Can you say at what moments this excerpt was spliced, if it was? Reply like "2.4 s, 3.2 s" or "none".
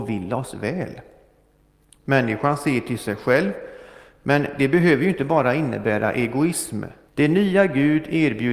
7.1 s